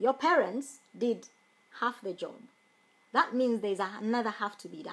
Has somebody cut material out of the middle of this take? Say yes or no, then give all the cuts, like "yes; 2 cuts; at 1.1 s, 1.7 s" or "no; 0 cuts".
no; 0 cuts